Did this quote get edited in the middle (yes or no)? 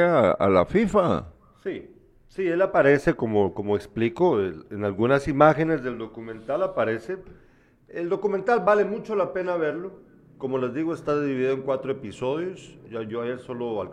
no